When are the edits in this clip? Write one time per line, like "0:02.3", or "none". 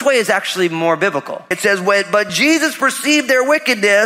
0:01.5